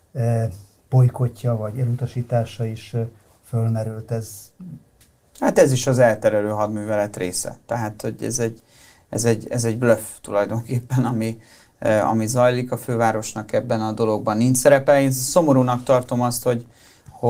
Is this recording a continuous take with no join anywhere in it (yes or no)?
yes